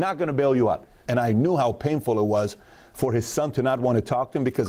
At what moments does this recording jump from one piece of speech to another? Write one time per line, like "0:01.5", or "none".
0:01.1